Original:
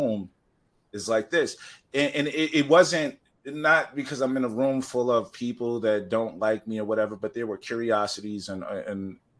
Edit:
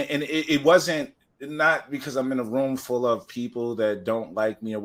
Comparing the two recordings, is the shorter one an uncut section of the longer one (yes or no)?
yes